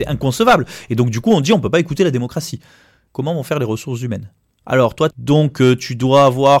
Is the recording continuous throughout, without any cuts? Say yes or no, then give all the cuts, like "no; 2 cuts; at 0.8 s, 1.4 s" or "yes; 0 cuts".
no; 2 cuts; at 3.1 s, 5.1 s